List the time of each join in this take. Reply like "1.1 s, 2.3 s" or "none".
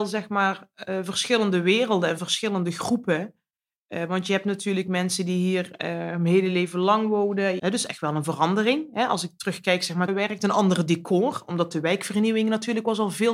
7.6 s, 10.1 s